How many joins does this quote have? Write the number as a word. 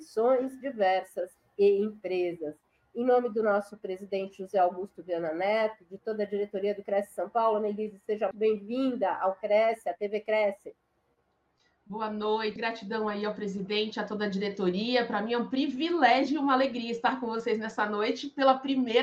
two